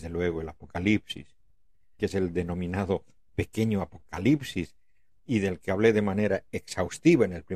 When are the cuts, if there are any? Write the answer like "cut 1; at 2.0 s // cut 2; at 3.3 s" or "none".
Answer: cut 1; at 2.0 s